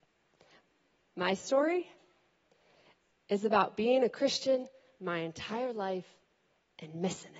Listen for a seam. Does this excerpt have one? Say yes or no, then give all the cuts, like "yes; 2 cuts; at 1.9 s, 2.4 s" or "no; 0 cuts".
no; 0 cuts